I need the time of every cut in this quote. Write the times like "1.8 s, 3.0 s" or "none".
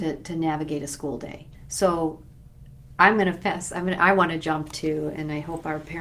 1.5 s

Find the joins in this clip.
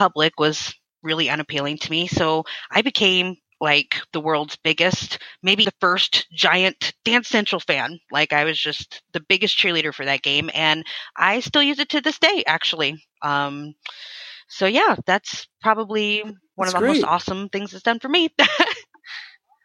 5.6 s

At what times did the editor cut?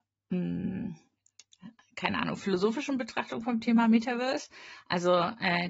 none

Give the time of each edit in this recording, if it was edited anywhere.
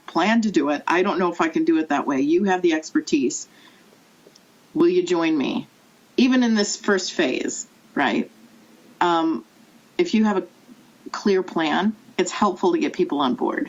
12.1 s

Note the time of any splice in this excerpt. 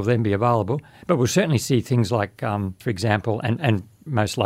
2.8 s

